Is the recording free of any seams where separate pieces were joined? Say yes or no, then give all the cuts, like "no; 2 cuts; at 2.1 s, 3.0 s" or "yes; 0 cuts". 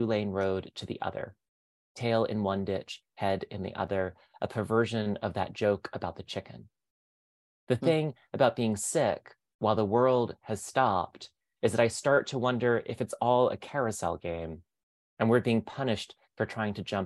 yes; 0 cuts